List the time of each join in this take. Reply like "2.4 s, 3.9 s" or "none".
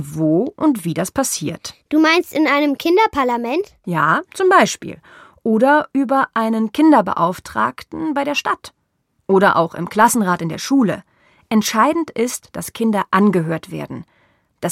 none